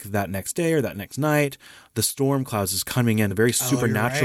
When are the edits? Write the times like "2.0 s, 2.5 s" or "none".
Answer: none